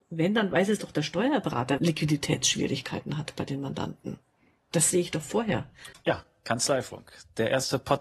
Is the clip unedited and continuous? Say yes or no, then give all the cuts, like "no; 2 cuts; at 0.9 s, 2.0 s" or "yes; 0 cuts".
no; 2 cuts; at 1.8 s, 5.9 s